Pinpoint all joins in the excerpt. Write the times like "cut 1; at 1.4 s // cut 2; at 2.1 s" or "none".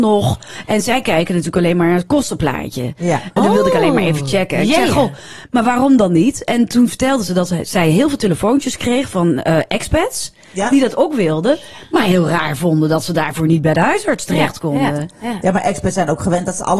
cut 1; at 3.4 s